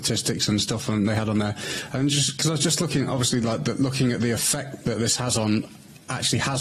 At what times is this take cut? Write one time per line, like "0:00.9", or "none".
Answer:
none